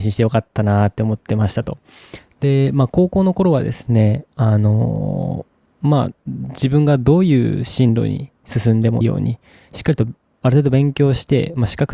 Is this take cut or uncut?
cut